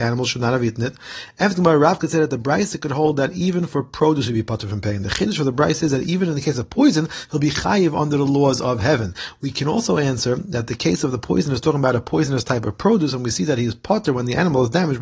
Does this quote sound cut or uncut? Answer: uncut